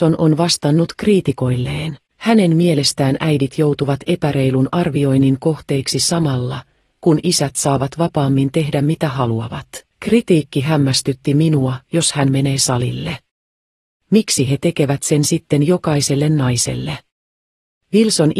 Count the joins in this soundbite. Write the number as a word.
three